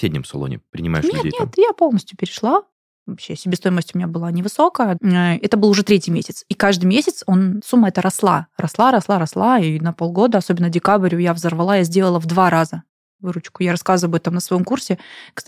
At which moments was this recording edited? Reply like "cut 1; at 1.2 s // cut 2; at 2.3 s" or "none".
cut 1; at 2.9 s // cut 2; at 5.0 s // cut 3; at 7.6 s